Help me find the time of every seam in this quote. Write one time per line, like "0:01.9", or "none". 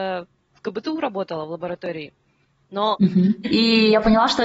0:03.4